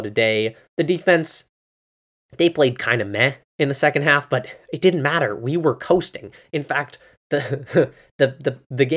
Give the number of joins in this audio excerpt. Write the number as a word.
zero